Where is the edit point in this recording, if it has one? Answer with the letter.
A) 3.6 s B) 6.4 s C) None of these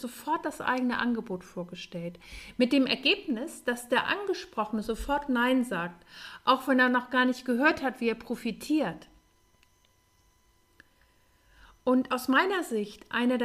C